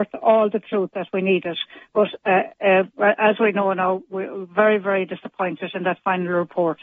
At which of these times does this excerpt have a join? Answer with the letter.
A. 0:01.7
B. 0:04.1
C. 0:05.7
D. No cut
D